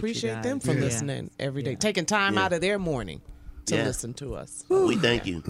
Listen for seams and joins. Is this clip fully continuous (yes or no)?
yes